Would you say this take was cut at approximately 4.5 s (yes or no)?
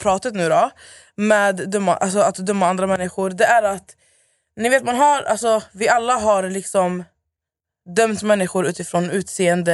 no